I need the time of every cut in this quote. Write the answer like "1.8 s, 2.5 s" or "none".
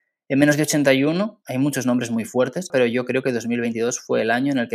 1.4 s, 2.7 s